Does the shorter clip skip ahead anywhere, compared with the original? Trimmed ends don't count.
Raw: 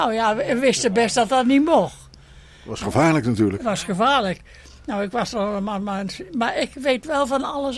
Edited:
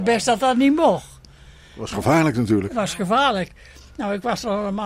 no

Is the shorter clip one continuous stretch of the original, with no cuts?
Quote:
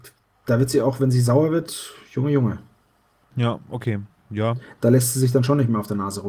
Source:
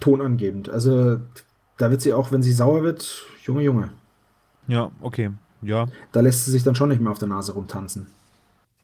yes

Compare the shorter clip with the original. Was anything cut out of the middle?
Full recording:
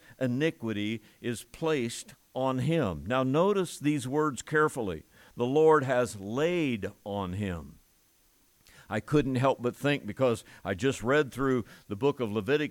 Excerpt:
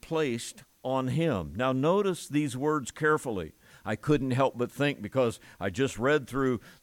yes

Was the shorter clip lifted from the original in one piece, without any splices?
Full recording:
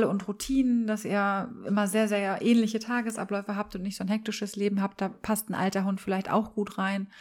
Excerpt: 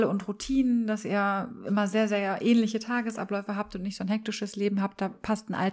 yes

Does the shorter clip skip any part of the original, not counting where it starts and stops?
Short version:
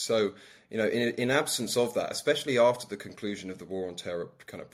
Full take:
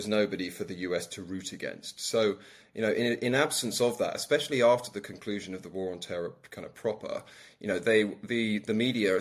no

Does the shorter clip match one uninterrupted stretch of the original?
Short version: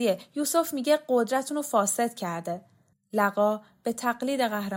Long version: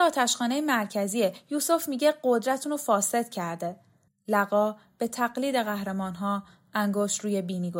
yes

